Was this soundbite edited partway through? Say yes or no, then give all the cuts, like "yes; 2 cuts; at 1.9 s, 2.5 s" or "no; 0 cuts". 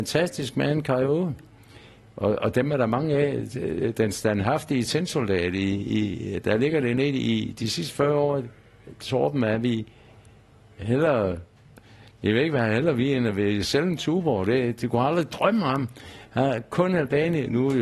no; 0 cuts